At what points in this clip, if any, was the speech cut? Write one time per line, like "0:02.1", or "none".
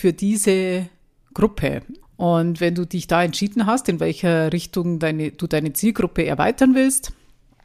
0:02.0